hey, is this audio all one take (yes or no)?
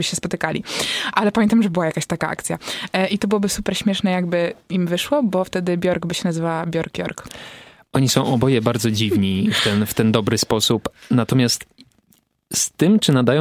yes